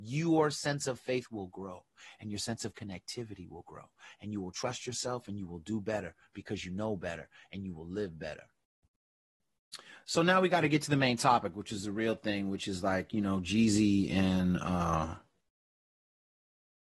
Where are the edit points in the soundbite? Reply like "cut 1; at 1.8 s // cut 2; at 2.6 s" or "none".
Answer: none